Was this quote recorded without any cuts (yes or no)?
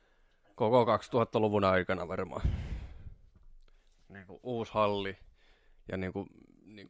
yes